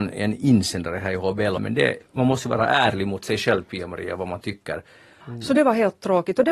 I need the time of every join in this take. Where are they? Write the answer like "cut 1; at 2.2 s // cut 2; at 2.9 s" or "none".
cut 1; at 1.6 s // cut 2; at 5.2 s